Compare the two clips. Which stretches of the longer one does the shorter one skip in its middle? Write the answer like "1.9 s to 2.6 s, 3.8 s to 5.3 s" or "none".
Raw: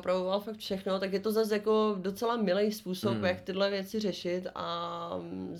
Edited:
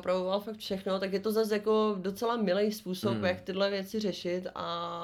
none